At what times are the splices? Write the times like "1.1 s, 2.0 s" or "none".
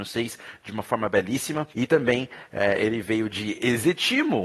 1.7 s